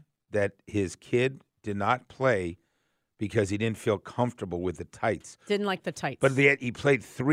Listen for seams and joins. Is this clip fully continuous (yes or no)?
yes